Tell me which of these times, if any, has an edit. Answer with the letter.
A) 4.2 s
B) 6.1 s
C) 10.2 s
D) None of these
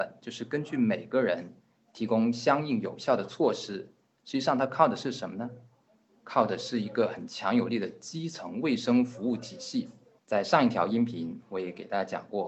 C